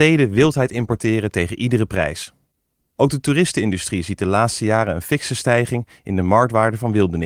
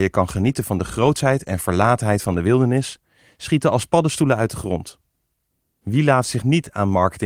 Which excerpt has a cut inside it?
first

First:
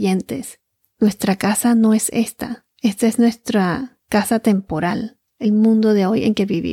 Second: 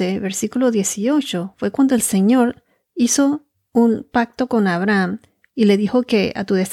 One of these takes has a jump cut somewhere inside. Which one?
first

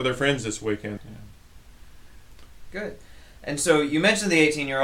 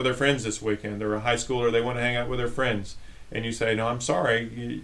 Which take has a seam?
first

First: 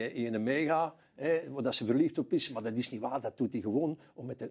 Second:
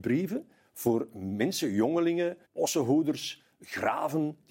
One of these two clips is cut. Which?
second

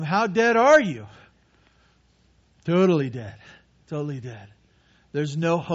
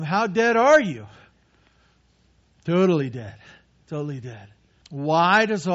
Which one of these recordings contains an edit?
second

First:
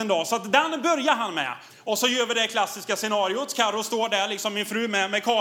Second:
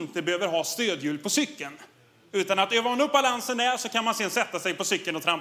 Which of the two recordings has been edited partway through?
first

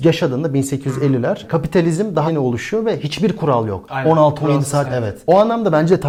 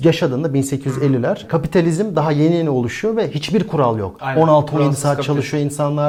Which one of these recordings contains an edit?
first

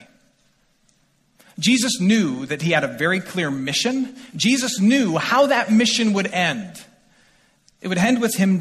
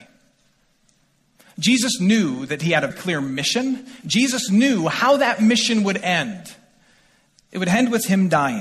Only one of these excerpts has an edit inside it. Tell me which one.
second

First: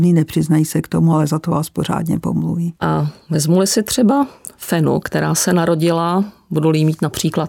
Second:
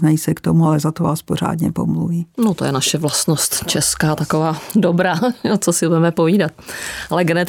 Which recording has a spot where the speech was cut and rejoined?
first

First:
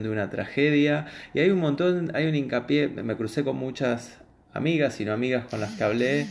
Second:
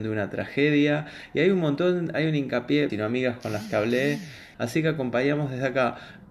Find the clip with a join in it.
second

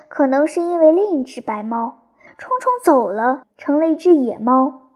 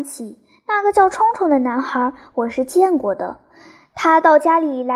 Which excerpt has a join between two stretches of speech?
first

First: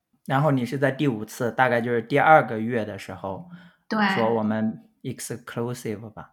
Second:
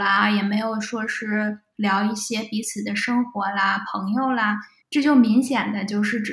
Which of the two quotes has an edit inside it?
second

